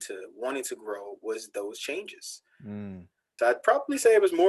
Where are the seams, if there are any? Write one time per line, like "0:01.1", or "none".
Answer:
0:03.4